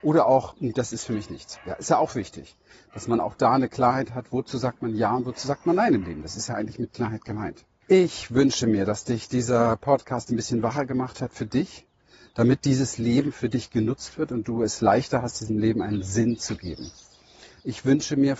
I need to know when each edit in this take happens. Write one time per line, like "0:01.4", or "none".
0:07.8